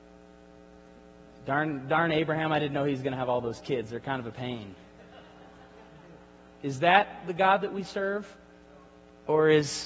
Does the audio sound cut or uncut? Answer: uncut